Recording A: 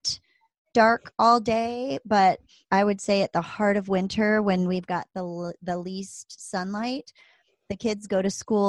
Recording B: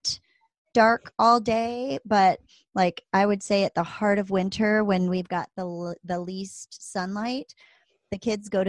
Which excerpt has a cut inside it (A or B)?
A